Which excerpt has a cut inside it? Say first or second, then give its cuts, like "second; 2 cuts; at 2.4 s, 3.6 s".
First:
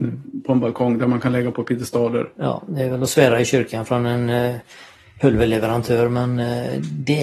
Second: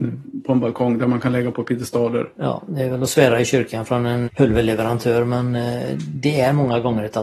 second; 1 cut; at 4.2 s